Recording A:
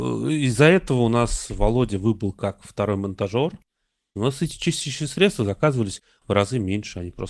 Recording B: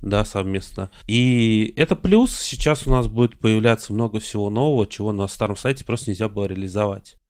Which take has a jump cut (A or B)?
A